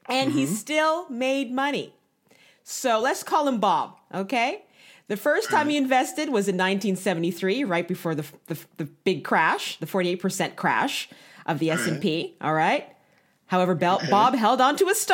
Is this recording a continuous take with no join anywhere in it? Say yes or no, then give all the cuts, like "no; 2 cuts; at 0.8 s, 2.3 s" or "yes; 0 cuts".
yes; 0 cuts